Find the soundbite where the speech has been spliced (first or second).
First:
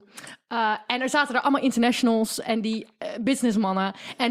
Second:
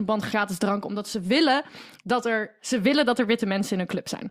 second